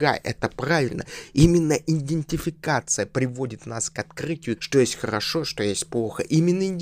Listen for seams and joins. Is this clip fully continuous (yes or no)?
no